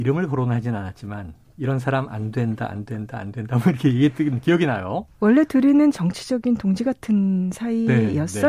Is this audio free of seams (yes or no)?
yes